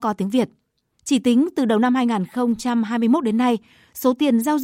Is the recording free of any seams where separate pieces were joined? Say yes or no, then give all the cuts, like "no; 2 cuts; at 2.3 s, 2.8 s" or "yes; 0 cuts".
no; 1 cut; at 0.9 s